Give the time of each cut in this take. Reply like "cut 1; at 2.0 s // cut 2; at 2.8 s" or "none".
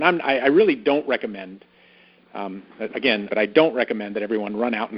cut 1; at 3.3 s